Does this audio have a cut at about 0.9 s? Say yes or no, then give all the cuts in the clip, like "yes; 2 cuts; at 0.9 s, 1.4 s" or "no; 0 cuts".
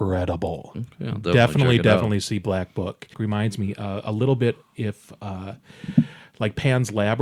no; 1 cut; at 3.1 s